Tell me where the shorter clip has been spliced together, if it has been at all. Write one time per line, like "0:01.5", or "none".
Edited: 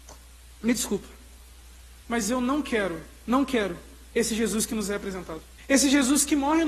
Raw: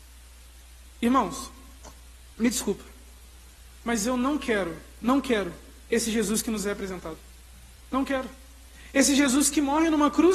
0:05.6